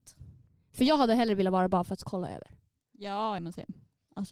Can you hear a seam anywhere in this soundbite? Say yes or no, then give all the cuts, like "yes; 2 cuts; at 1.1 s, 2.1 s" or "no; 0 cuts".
no; 0 cuts